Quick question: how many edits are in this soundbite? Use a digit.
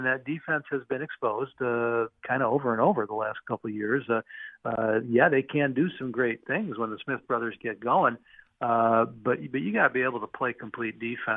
0